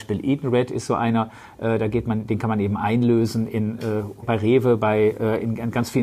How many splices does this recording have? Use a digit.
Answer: 1